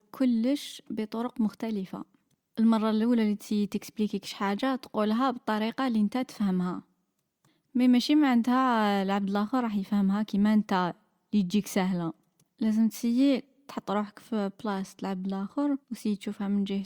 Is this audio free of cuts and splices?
no; 1 cut; at 15.8 s

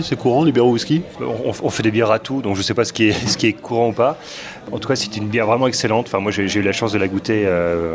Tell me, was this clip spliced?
no; 0 cuts

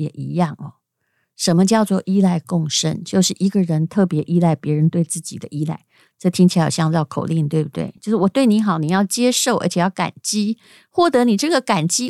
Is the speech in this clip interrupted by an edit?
no; 0 cuts

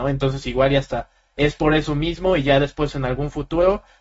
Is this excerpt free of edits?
yes; 0 cuts

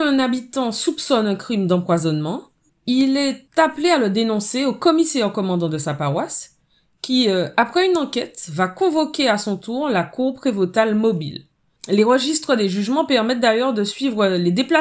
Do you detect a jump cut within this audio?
no; 0 cuts

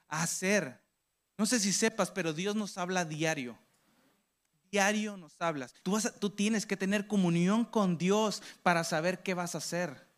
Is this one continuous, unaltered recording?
no; 1 cut; at 5.8 s

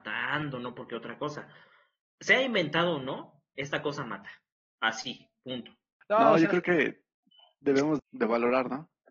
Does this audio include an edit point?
yes; 2 cuts; at 6.0 s, 8.0 s

